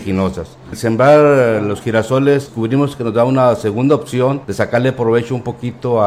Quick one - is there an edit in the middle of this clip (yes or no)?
yes